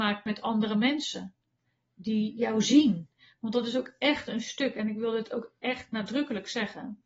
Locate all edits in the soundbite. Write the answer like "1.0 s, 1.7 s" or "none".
none

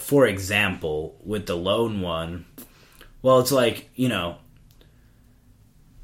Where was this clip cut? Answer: none

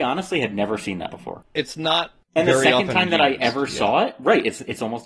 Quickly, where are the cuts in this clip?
none

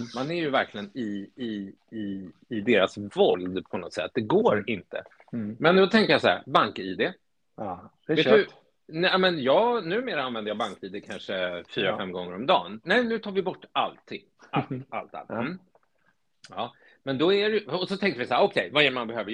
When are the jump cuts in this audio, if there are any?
12.8 s

